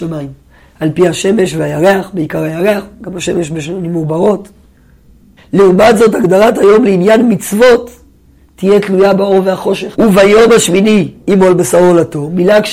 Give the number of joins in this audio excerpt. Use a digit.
3